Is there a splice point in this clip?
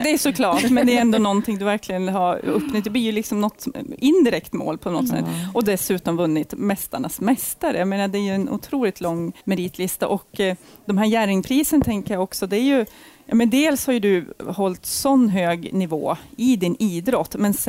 yes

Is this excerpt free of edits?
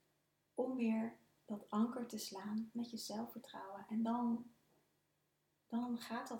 yes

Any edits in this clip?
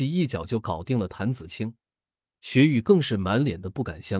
yes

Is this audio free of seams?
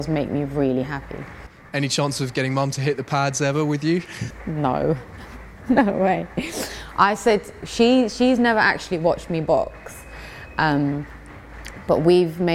yes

